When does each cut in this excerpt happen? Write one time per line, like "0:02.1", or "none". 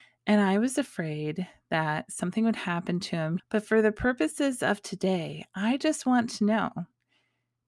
0:03.4